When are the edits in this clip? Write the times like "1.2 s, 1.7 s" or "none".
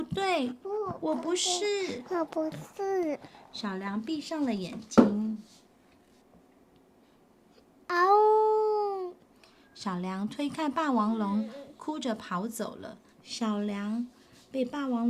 13.1 s

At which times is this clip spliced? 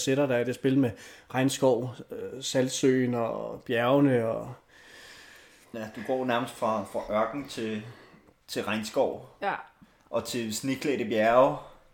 none

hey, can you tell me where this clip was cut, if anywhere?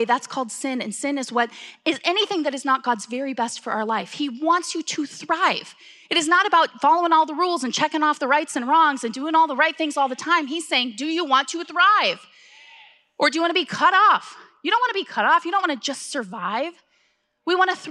none

